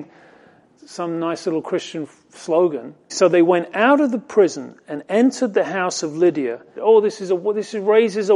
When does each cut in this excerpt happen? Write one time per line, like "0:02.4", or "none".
0:03.1
0:06.8